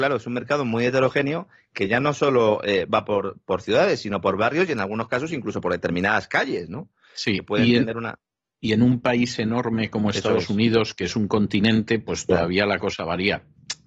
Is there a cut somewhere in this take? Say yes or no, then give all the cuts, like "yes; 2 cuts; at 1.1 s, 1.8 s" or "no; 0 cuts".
no; 0 cuts